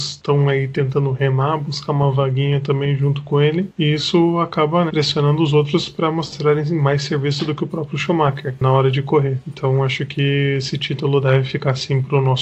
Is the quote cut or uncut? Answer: cut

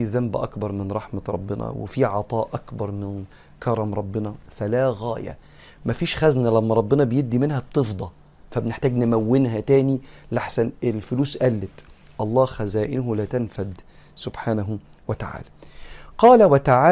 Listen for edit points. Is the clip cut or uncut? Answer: uncut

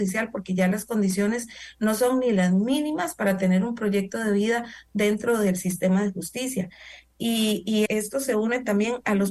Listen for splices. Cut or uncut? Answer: cut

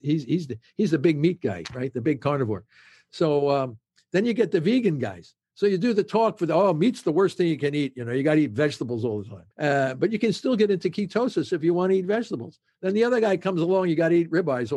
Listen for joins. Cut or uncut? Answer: cut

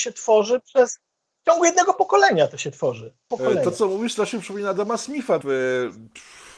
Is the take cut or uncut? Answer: cut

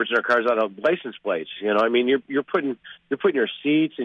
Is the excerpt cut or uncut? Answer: uncut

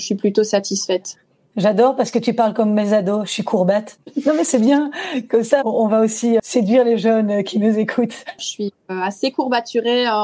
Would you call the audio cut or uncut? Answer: cut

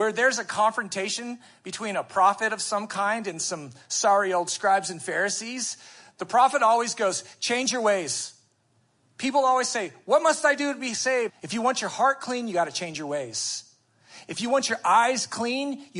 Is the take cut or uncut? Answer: cut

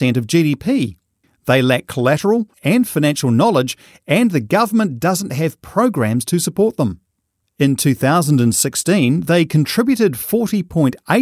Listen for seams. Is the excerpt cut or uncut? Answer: cut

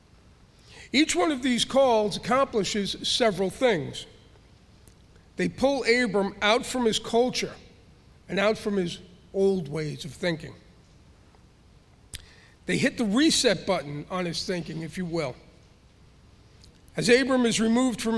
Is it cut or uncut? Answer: uncut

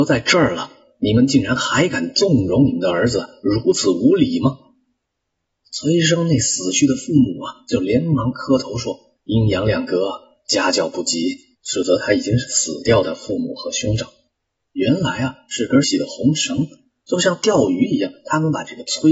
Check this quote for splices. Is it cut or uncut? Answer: cut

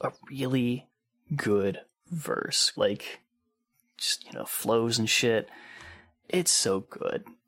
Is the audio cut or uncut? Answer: cut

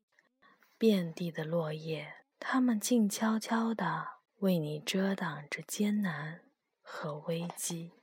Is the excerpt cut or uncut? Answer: cut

